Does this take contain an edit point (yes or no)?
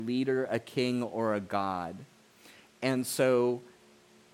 no